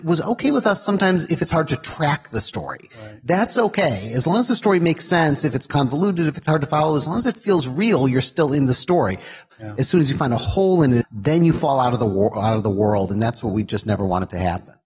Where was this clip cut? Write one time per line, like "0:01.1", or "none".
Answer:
0:09.5
0:11.0